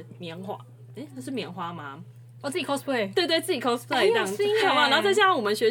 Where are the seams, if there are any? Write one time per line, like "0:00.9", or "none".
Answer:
0:02.4
0:04.6